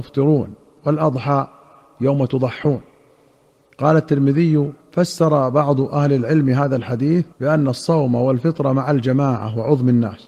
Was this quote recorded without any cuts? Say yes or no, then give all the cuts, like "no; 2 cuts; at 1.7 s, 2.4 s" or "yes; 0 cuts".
no; 2 cuts; at 4.8 s, 7.3 s